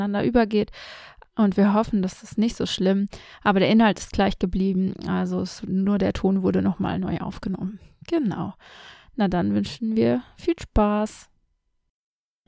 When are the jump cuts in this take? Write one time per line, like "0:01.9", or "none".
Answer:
none